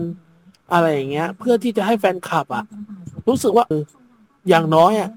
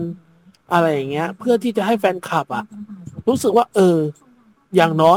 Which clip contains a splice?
first; 1 cut; at 3.7 s

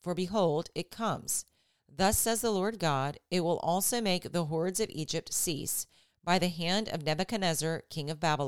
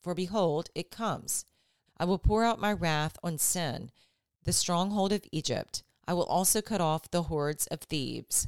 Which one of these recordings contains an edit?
second; 1 cut; at 1.9 s

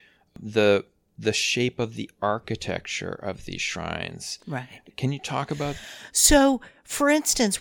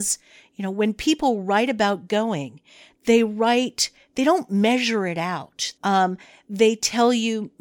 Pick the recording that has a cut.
second; 1 cut; at 5.8 s

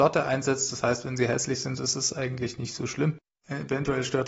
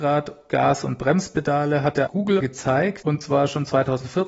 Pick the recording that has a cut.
second; 1 cut; at 2.1 s

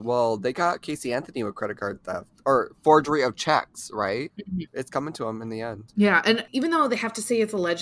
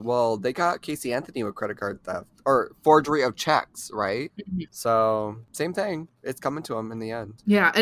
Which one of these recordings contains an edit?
first; 1 cut; at 4.7 s

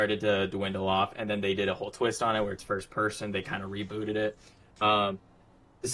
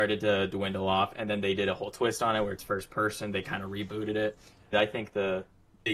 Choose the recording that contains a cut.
second; 1 cut; at 4.7 s

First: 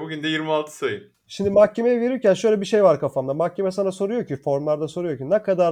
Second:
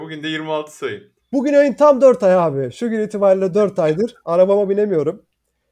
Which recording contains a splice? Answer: first; 1 cut; at 1.1 s

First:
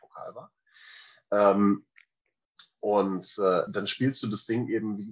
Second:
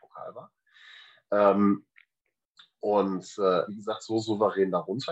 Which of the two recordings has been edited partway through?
second; 1 cut; at 3.7 s

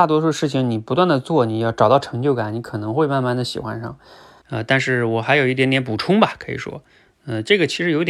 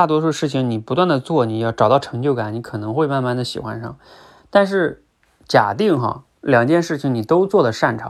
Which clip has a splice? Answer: first; 1 cut; at 4.4 s

